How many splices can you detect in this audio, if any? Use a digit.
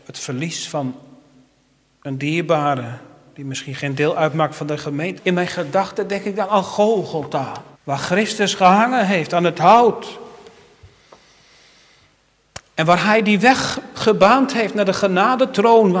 2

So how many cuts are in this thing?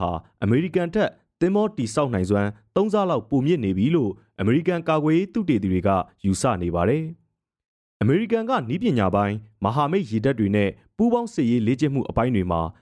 0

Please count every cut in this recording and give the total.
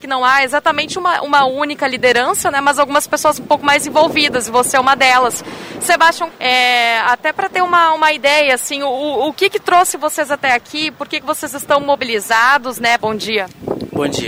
2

